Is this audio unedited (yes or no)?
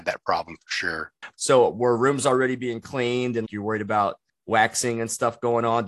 no